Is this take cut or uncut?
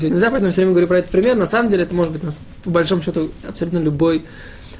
cut